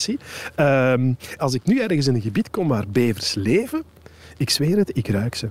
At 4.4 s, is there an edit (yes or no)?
no